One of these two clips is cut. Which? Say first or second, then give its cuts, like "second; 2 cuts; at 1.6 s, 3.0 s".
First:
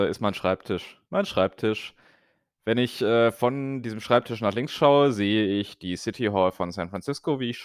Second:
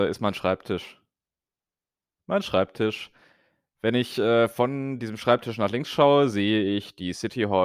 first; 1 cut; at 1.1 s